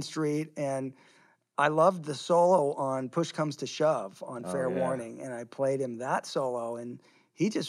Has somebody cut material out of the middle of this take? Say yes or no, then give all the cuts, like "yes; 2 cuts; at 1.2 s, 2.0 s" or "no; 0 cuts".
no; 0 cuts